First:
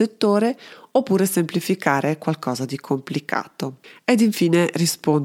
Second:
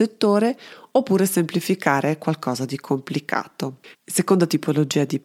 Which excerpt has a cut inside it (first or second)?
second